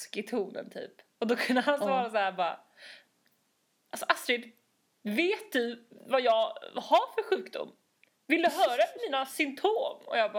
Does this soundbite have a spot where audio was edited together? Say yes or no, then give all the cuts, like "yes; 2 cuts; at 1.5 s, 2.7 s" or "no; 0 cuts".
no; 0 cuts